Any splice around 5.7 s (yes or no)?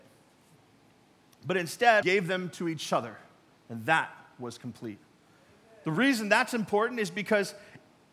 no